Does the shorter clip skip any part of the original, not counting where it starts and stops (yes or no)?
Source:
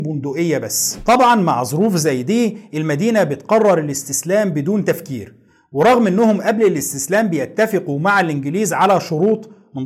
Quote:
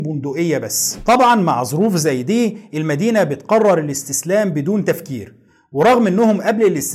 no